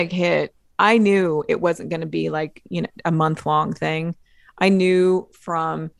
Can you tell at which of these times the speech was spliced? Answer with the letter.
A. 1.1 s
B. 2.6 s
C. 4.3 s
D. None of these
D